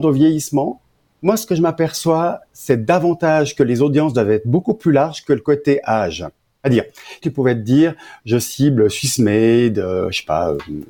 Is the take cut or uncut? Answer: cut